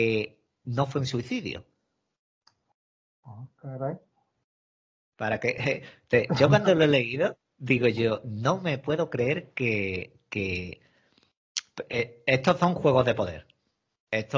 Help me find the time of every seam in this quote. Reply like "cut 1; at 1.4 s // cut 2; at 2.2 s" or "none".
none